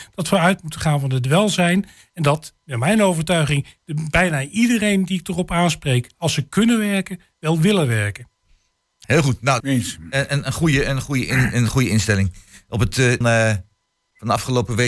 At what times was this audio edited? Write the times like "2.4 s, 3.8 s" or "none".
9.6 s, 13.2 s